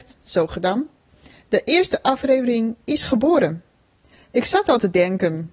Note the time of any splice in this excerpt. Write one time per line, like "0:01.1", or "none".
0:04.1

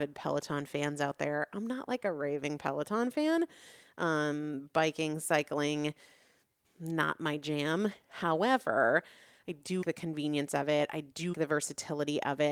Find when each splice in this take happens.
0:06.6
0:09.8
0:11.3

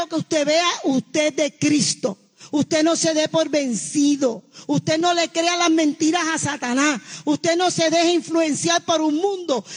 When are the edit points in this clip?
none

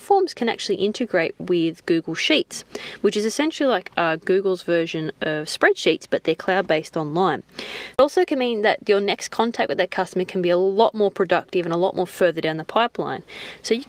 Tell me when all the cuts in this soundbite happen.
0:07.9

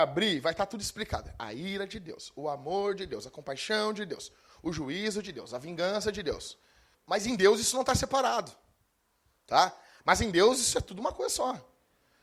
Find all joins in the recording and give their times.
0:06.9
0:10.0

